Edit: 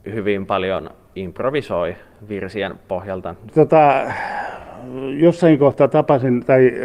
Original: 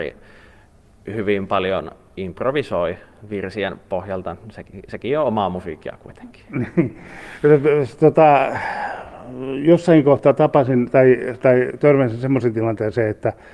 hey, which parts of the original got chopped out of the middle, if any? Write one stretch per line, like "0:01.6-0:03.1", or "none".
0:04.5-0:08.0